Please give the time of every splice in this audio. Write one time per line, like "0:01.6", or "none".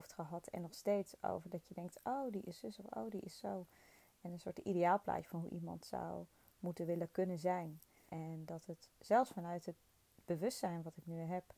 0:08.1